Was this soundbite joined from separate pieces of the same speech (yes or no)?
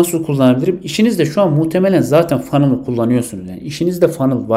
no